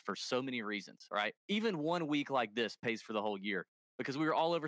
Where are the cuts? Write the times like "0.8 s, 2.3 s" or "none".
1.4 s